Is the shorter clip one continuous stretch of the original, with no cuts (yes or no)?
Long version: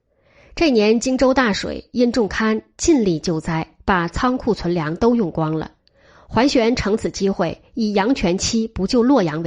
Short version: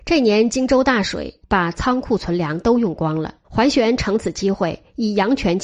no